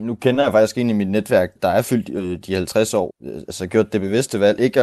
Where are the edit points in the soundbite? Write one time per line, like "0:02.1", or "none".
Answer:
0:01.6
0:03.1